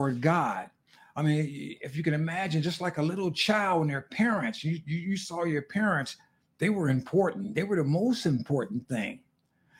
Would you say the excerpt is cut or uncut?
uncut